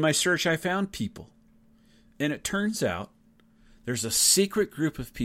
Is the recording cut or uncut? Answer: uncut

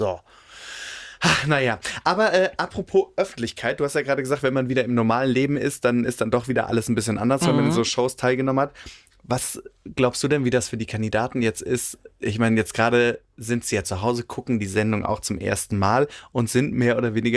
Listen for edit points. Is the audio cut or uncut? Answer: uncut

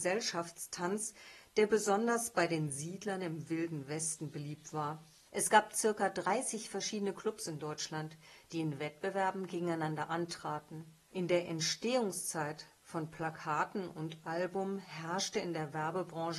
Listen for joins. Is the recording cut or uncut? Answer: cut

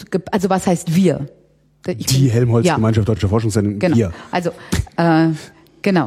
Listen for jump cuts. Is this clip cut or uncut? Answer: uncut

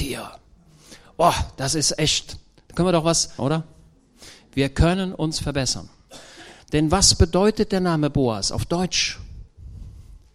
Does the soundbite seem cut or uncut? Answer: cut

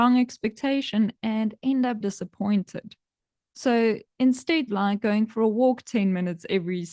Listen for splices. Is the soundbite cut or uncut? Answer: cut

